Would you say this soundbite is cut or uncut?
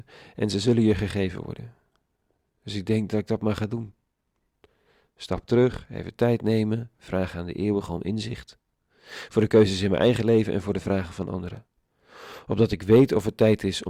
uncut